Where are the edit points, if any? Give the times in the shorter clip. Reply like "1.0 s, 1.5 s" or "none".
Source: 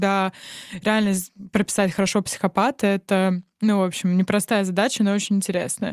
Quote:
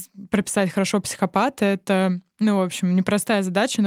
none